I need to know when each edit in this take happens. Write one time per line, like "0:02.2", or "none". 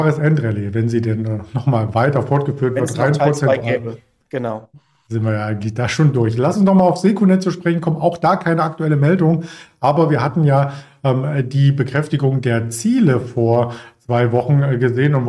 none